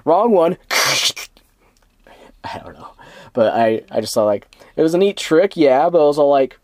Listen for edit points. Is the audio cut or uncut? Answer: uncut